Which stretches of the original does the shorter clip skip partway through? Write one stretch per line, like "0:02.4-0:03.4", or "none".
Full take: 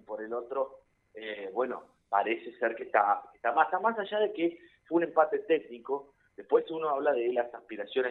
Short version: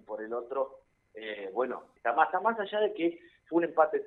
0:02.0-0:03.4